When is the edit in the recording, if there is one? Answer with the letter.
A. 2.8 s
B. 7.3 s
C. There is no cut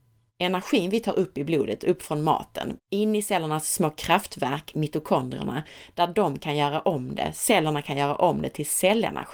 A